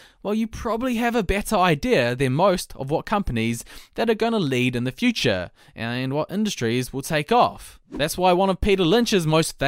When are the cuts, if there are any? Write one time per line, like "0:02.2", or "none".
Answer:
none

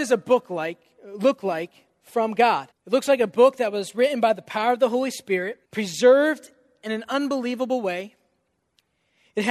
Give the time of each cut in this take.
0:02.7
0:05.6

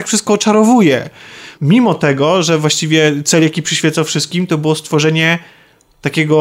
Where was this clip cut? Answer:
0:01.6

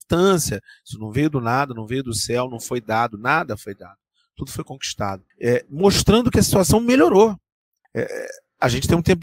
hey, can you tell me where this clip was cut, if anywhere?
0:05.3
0:07.8

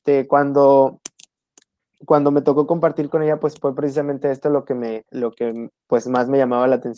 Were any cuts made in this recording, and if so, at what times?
none

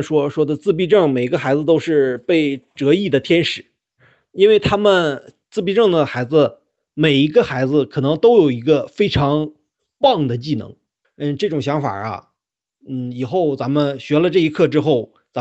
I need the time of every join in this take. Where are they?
0:11.0

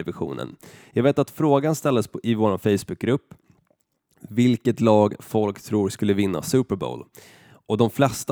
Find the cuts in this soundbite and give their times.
none

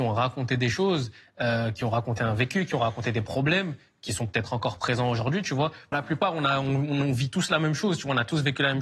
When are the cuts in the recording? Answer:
0:05.9

